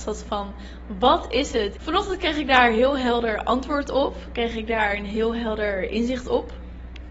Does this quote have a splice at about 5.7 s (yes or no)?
no